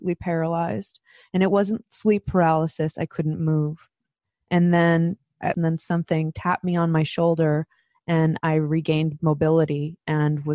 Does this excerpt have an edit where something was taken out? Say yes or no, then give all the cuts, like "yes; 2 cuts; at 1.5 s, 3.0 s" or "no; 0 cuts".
yes; 2 cuts; at 2.9 s, 5.5 s